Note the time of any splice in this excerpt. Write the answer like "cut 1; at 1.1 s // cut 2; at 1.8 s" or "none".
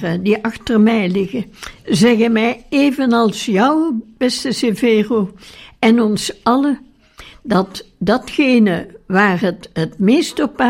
none